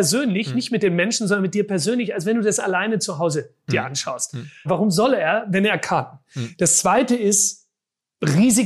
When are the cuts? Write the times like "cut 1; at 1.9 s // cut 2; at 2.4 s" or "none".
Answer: cut 1; at 4.7 s

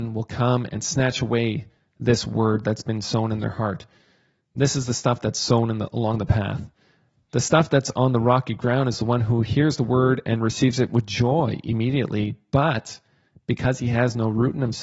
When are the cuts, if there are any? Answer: none

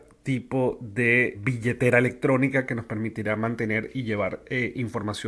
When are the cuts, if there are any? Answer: cut 1; at 1.3 s

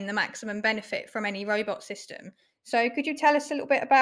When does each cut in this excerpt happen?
none

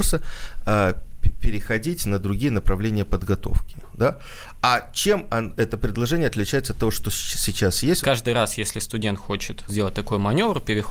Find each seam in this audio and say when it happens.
cut 1; at 8.0 s // cut 2; at 9.7 s

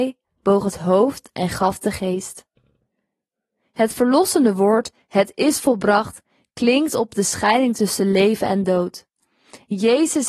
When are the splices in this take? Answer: none

